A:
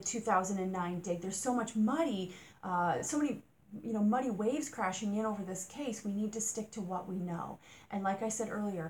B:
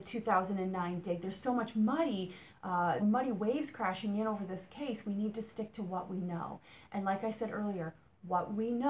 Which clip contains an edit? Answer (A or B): B